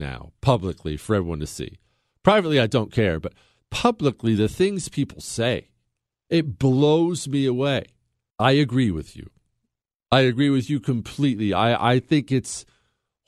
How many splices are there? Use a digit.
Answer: 1